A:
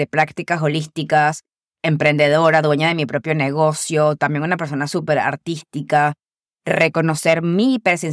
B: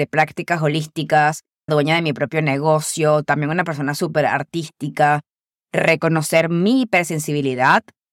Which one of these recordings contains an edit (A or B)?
B